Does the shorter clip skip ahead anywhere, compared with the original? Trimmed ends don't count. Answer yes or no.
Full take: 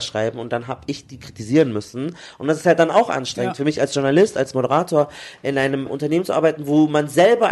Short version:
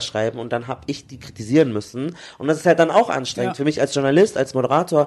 no